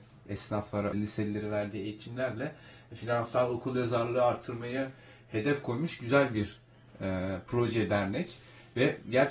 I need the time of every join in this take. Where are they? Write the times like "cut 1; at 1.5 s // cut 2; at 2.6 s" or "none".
cut 1; at 0.9 s